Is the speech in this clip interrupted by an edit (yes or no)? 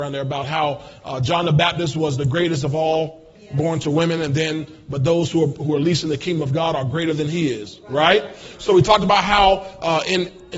no